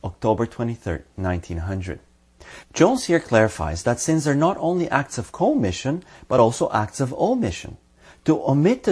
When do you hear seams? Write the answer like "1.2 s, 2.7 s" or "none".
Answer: none